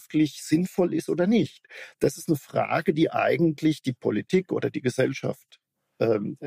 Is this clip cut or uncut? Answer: uncut